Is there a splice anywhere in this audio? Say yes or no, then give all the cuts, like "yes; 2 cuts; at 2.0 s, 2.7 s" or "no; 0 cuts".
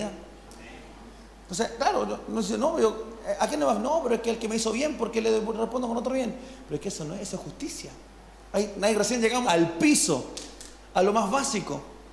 yes; 1 cut; at 9.4 s